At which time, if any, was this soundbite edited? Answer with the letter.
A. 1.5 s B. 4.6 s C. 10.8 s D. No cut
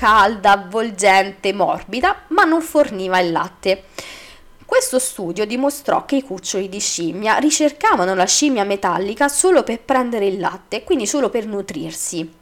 D